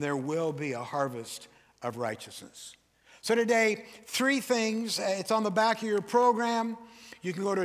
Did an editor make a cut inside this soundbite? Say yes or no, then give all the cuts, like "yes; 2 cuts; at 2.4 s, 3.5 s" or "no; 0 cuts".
no; 0 cuts